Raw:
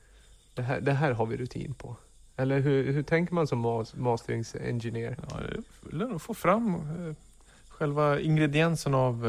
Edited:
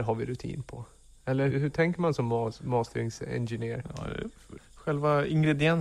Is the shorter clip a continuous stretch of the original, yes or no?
no